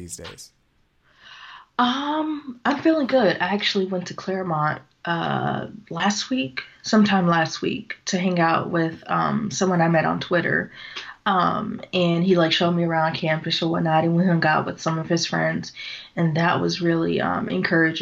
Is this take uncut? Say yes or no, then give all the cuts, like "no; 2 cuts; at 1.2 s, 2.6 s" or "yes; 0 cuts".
yes; 0 cuts